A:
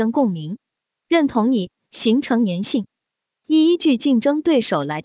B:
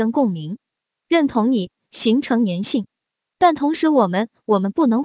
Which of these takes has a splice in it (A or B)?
A